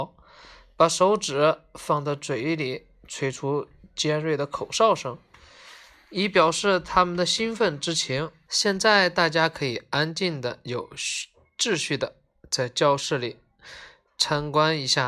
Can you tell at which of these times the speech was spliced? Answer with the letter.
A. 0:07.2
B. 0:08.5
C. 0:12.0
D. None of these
B